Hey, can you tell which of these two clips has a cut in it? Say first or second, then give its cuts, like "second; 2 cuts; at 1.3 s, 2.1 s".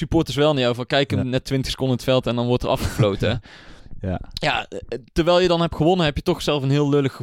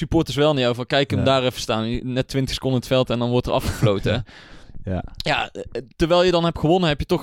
first; 1 cut; at 1.2 s